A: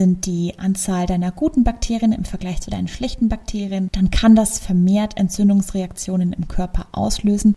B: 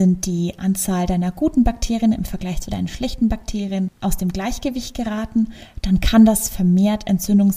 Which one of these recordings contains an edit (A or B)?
A